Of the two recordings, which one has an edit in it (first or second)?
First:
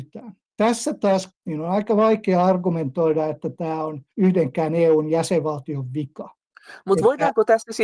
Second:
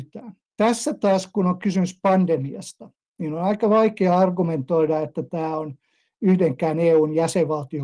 first